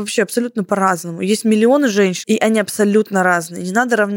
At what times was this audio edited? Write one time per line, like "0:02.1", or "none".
0:02.2